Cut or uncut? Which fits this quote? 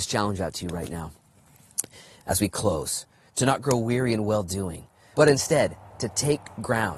cut